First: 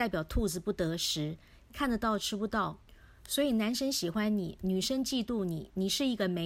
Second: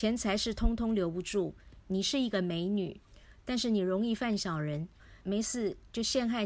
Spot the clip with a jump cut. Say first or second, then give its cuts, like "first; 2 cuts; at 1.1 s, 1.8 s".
second; 2 cuts; at 1.8 s, 5.2 s